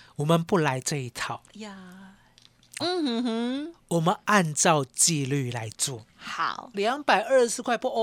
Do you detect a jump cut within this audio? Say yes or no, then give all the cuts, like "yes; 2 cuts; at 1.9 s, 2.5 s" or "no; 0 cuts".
yes; 2 cuts; at 2.8 s, 6.7 s